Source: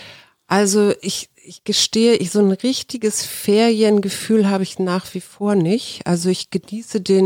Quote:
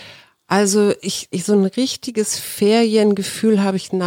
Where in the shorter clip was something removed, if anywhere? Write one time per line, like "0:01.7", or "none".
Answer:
0:01.3